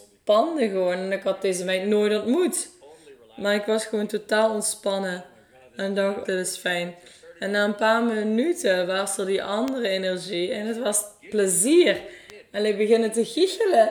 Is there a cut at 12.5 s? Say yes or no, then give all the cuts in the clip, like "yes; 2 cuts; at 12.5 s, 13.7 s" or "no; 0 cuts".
no; 1 cut; at 6.3 s